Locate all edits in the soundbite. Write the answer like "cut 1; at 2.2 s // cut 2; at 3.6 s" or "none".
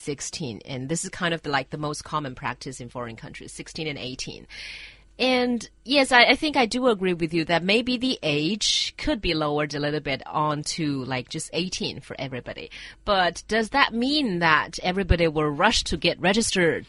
none

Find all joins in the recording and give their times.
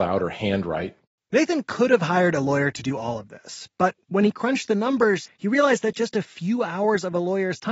none

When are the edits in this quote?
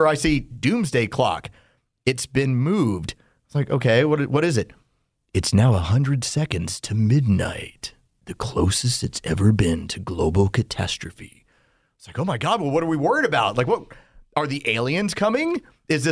none

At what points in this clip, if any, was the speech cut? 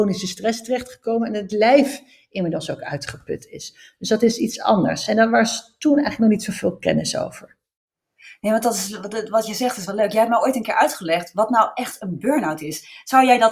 none

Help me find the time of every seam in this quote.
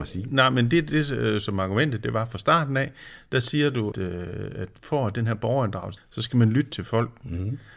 cut 1; at 3.9 s // cut 2; at 6.0 s

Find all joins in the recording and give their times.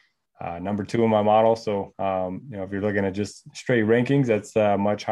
none

